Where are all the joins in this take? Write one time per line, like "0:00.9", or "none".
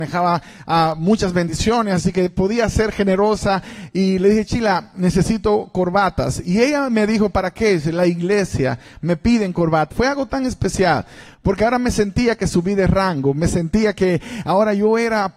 0:09.9